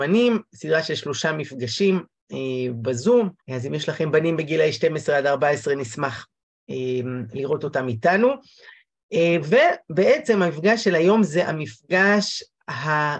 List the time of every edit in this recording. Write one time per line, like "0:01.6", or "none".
0:03.4